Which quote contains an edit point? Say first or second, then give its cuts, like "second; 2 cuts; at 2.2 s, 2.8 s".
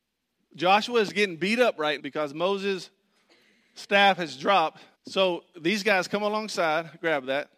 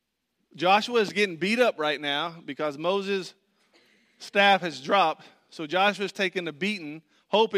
first; 2 cuts; at 2.0 s, 4.9 s